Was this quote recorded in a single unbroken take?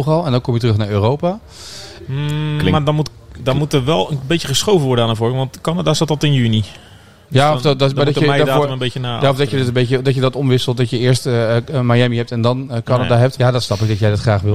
no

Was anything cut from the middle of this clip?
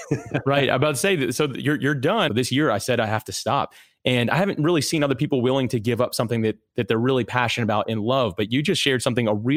yes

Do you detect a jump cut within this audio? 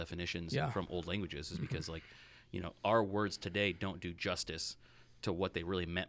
no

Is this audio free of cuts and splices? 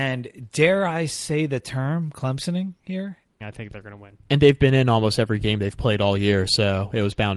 no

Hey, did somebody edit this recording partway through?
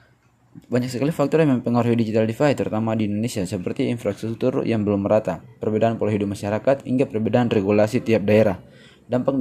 no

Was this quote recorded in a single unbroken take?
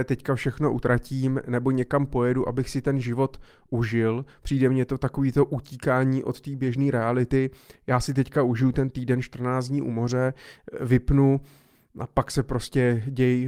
yes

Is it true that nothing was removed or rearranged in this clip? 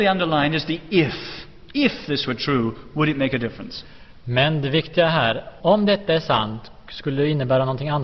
no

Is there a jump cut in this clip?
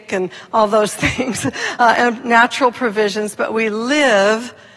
no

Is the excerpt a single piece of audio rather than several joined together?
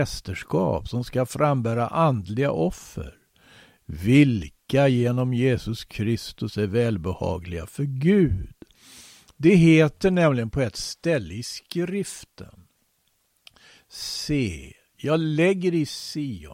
yes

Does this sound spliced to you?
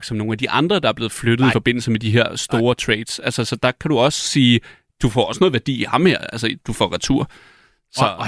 no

